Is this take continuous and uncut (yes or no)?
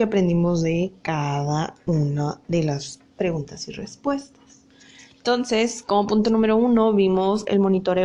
yes